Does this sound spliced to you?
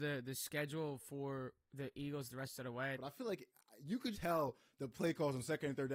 yes; 2 cuts; at 3.0 s, 4.1 s

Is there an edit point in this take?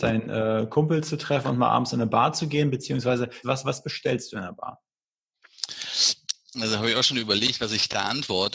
yes; 2 cuts; at 3.4 s, 6.5 s

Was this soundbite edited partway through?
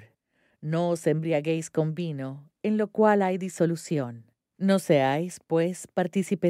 yes; 1 cut; at 4.5 s

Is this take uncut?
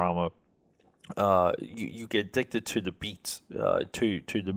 yes; 0 cuts

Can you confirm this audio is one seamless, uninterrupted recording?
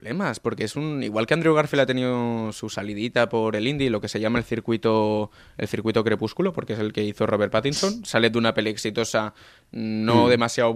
yes; 0 cuts

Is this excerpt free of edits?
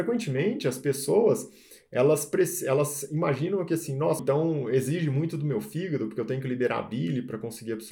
no; 1 cut; at 4.2 s

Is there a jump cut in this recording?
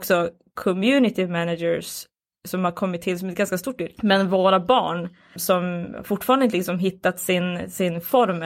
yes; 2 cuts; at 4.0 s, 5.4 s

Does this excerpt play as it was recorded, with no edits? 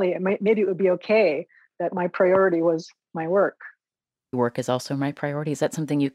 no; 1 cut; at 4.3 s

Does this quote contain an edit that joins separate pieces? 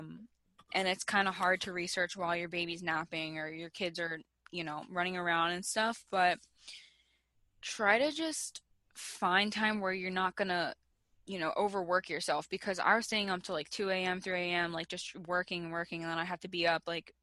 no; 0 cuts

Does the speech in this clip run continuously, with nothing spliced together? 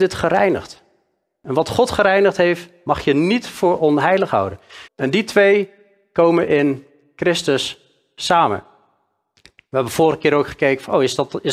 no; 1 cut; at 4.9 s

